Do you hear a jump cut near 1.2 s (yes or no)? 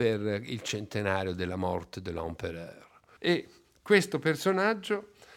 no